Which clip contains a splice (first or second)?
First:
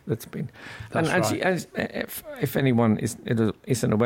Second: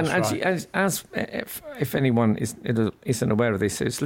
first